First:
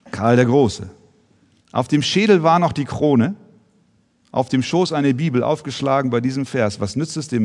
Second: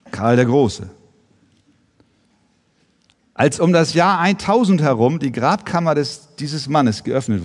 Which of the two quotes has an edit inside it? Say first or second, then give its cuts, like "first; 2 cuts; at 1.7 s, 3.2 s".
first; 1 cut; at 1.6 s